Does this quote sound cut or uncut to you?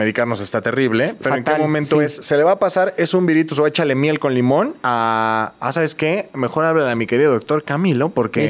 uncut